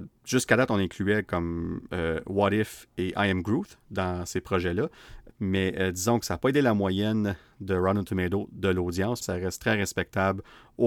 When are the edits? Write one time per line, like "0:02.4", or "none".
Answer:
0:05.3
0:09.2